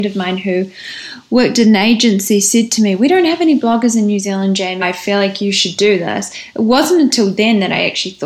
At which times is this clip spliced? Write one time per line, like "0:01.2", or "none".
0:04.8

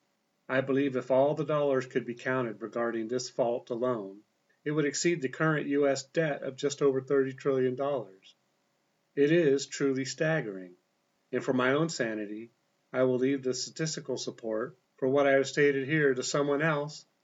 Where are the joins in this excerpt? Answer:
none

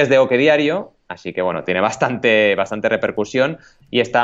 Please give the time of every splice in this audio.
none

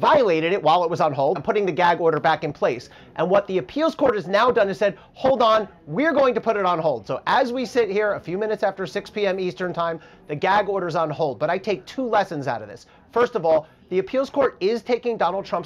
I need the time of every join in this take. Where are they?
0:01.4

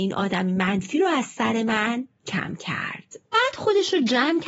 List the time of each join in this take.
0:03.2

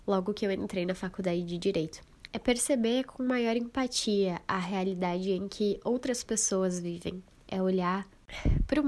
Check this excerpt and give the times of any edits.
0:02.3

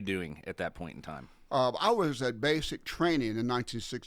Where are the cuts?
none

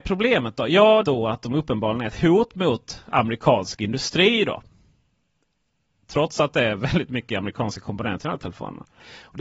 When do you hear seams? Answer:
0:01.0

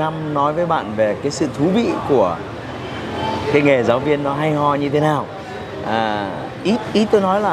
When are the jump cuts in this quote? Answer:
none

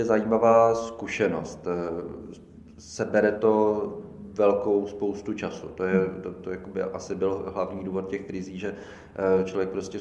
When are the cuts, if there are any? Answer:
none

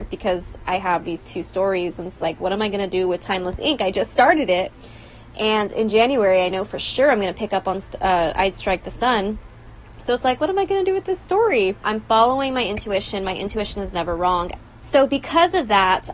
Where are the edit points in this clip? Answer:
0:11.8
0:14.6

